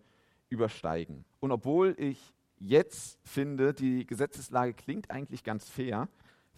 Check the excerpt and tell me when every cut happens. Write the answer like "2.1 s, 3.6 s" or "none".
1.3 s